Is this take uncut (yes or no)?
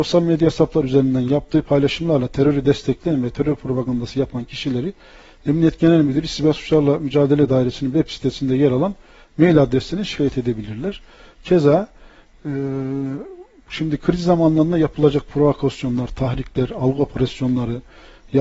yes